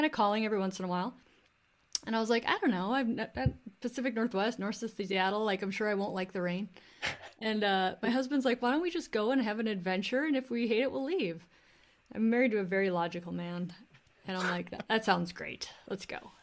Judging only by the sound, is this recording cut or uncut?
uncut